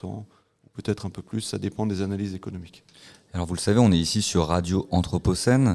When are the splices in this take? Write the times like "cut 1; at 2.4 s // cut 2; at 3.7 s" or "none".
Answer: none